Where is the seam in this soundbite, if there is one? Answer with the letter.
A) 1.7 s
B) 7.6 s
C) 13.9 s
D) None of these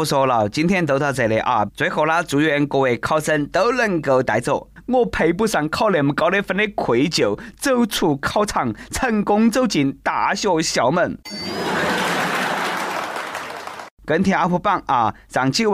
A